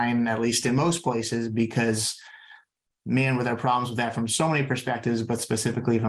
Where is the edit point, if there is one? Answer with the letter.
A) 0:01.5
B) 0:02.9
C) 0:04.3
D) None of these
D